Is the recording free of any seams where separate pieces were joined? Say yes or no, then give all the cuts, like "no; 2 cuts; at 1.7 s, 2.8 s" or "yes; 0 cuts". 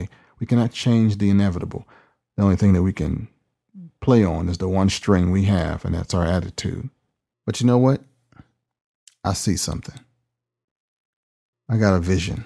no; 1 cut; at 7.3 s